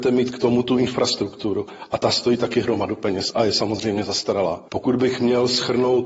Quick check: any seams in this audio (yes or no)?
no